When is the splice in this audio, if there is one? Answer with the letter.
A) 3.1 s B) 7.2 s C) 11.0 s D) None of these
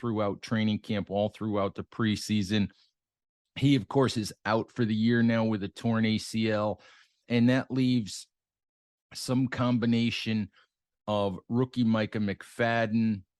B